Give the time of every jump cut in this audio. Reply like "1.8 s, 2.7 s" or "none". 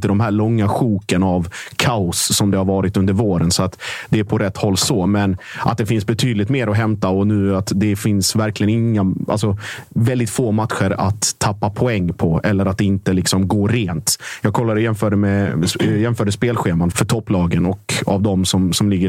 16.9 s